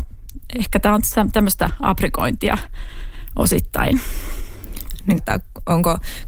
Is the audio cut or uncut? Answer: cut